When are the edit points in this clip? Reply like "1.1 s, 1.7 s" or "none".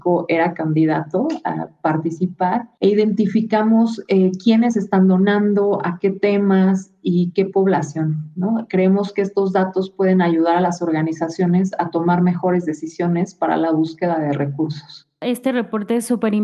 2.8 s